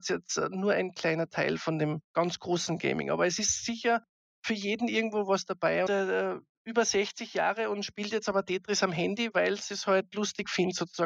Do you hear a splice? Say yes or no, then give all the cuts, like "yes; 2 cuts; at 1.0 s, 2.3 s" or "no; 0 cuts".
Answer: yes; 3 cuts; at 2.0 s, 5.9 s, 9.3 s